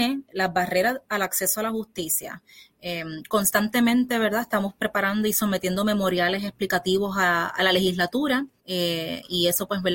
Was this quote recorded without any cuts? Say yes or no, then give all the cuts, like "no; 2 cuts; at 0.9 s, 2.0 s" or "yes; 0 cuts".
no; 1 cut; at 8.6 s